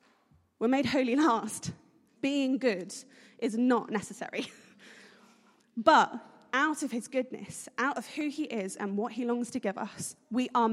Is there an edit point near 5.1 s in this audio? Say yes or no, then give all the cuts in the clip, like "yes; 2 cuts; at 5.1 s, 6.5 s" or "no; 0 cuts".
no; 1 cut; at 2.1 s